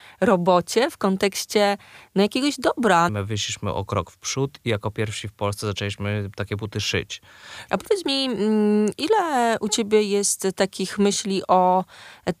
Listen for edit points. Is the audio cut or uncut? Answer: cut